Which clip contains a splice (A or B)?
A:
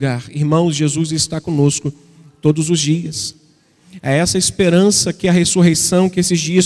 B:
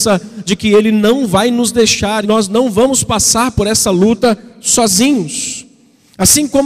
B